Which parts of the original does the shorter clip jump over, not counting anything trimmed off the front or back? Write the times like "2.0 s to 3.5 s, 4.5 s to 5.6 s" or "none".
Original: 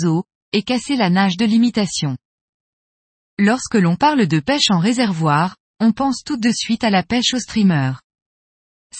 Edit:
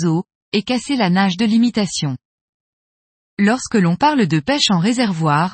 none